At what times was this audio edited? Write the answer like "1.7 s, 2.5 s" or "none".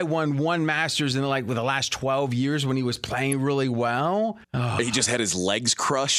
4.4 s